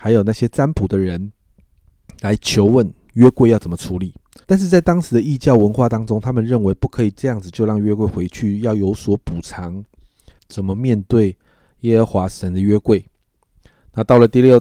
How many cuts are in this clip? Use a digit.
2